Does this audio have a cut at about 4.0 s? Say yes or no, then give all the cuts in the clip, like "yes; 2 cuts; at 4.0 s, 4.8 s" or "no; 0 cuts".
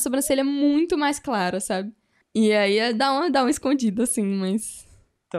no; 1 cut; at 2.2 s